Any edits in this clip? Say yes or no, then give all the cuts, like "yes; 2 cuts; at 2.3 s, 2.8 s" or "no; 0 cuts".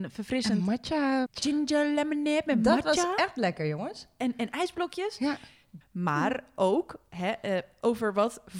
yes; 2 cuts; at 1.3 s, 5.8 s